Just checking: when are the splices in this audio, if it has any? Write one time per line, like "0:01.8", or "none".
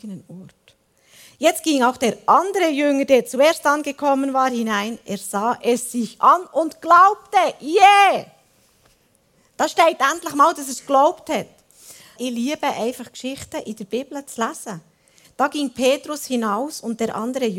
0:12.2
0:15.2